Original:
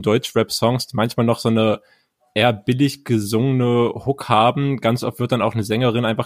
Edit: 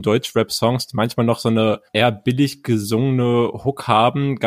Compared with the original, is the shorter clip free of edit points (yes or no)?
no